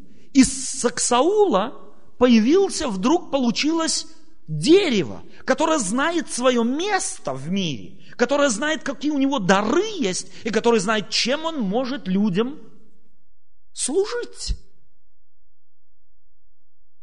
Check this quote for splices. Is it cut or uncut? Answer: uncut